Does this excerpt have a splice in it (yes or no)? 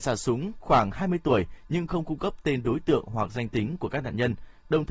no